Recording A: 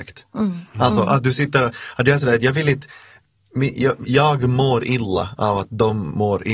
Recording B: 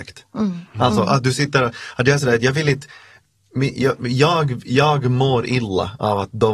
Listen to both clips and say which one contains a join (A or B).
A